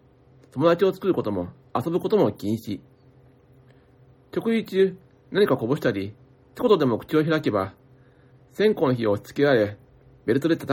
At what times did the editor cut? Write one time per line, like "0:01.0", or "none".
none